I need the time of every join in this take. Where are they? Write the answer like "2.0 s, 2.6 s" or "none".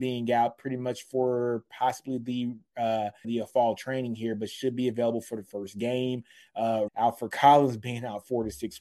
3.2 s, 6.9 s